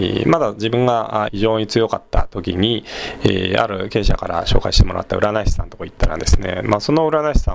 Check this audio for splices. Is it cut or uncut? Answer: cut